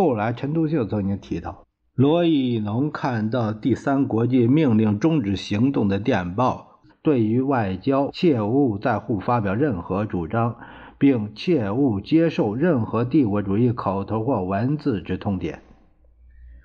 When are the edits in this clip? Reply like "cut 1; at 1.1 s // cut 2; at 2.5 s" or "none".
cut 1; at 6.9 s // cut 2; at 8.1 s